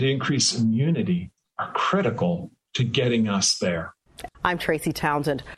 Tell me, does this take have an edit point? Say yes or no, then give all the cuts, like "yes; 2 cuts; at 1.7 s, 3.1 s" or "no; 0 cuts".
yes; 1 cut; at 4.3 s